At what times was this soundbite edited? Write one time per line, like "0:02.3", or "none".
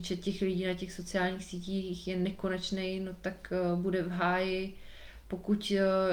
none